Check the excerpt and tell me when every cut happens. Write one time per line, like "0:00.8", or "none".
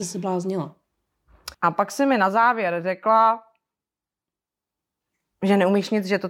0:01.5